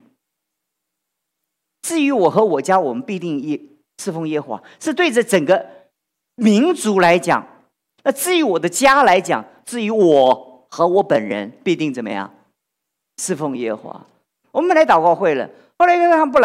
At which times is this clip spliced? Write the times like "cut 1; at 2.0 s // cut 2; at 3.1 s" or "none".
cut 1; at 8.0 s // cut 2; at 14.4 s